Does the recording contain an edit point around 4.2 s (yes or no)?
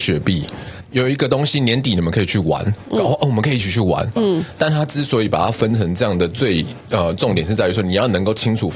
yes